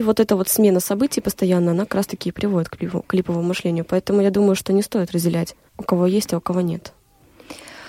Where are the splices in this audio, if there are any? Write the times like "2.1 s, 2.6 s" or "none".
5.7 s